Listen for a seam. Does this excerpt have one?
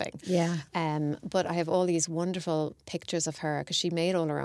no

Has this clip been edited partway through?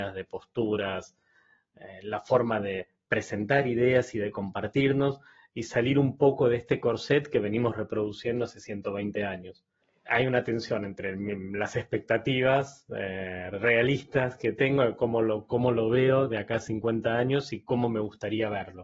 no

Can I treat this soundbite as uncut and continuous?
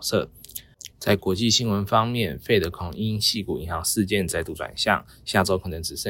no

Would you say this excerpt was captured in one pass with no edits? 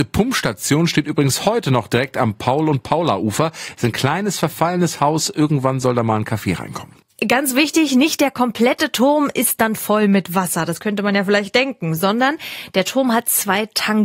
yes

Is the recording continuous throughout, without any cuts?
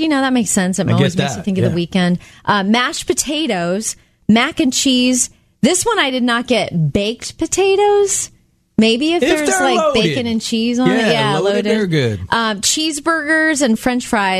yes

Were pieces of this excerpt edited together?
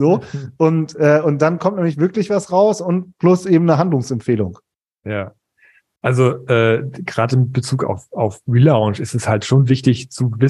no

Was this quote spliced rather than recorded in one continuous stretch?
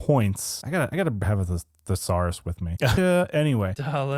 yes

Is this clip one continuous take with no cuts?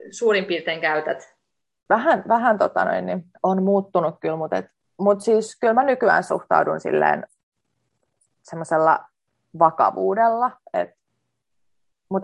no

